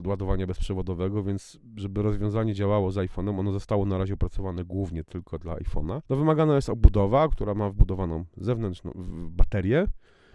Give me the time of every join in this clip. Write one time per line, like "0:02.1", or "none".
0:06.1